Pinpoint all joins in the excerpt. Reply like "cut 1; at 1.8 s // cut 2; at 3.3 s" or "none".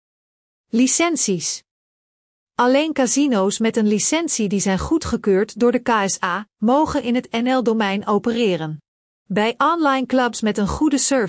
cut 1; at 6.5 s // cut 2; at 9.3 s